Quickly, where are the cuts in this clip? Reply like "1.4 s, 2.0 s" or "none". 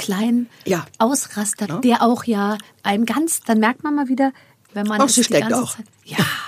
1.6 s, 4.7 s